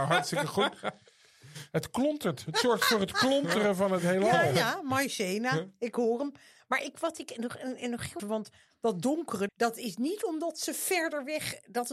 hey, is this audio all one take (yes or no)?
no